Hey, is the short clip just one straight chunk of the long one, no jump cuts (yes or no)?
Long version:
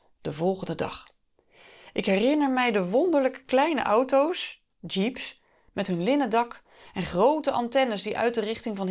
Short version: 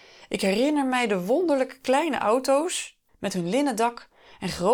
no